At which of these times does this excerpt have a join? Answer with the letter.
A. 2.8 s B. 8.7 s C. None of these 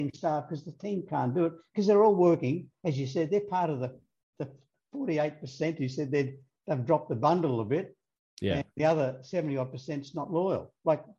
C